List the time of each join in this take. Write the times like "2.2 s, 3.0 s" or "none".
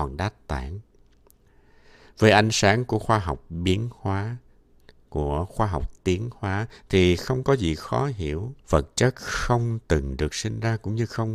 8.6 s